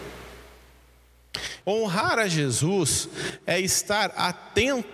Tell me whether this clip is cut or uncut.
cut